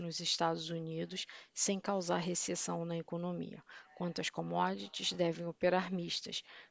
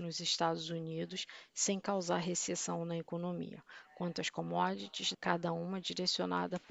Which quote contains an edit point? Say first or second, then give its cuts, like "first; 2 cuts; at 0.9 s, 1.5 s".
second; 1 cut; at 5.1 s